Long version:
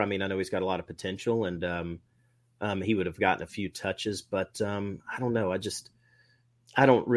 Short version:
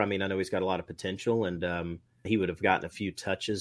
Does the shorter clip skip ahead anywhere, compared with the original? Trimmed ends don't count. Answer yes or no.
yes